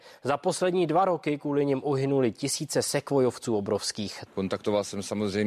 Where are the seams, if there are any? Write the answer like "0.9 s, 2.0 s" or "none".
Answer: 4.3 s